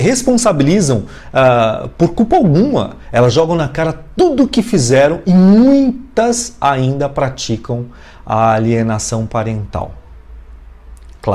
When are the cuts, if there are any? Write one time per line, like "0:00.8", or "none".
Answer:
none

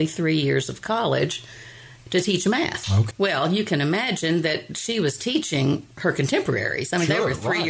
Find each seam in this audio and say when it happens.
0:03.1

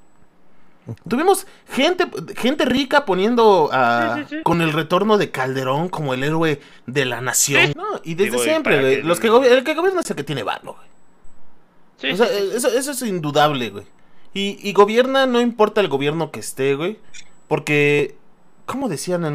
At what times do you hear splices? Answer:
0:04.4
0:07.7
0:14.6

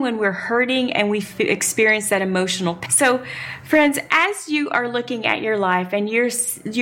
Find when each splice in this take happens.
0:02.9

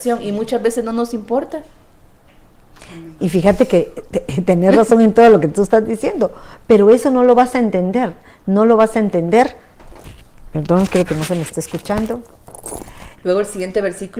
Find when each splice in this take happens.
0:13.1

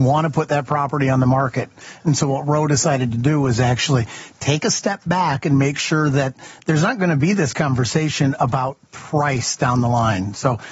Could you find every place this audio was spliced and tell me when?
none

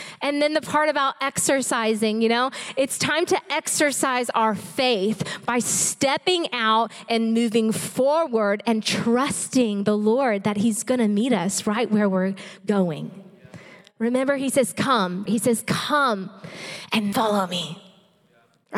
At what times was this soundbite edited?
0:15.3
0:17.1

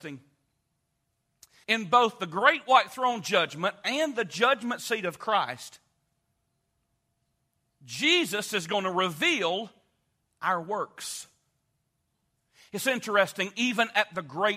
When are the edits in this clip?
0:01.6

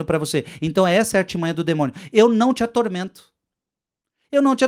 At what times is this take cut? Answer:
none

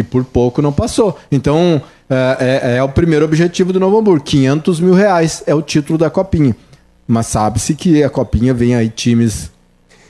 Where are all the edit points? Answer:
none

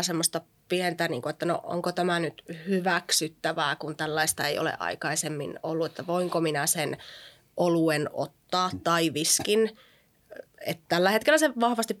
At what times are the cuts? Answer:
none

